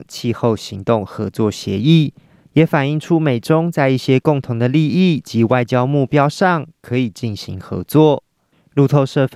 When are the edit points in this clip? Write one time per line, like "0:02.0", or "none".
none